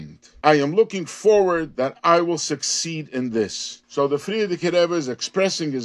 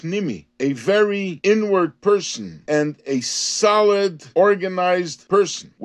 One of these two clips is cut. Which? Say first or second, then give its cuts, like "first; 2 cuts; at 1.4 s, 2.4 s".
second; 1 cut; at 2.7 s